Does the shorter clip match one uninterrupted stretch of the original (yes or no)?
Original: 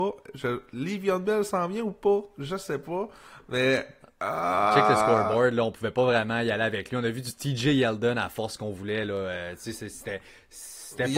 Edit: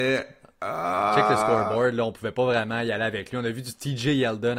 yes